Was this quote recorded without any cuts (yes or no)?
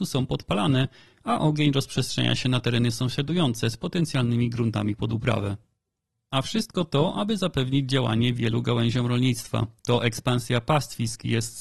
no